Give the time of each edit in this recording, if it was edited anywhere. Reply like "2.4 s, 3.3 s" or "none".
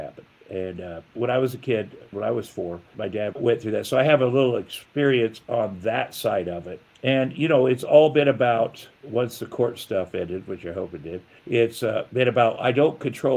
none